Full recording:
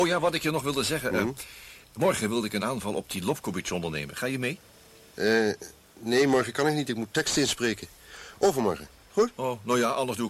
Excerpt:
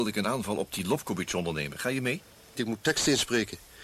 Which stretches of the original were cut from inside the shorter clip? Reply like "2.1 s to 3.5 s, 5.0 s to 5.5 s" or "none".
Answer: 4.9 s to 6.9 s